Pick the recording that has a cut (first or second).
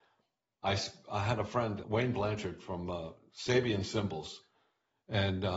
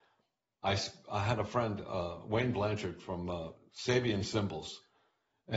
first